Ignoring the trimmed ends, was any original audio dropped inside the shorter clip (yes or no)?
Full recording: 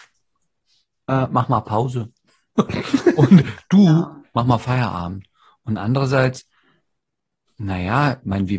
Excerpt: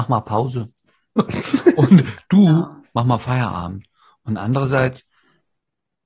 no